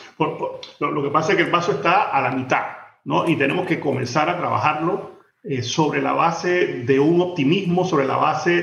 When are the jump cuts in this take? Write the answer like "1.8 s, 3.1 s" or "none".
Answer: none